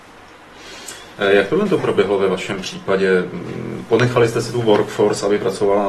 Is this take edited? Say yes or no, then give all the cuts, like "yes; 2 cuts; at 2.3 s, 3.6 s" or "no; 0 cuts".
yes; 1 cut; at 1.2 s